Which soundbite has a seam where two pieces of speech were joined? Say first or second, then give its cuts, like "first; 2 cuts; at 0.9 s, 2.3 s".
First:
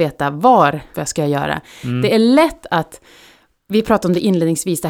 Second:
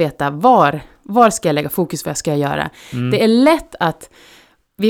first; 1 cut; at 0.9 s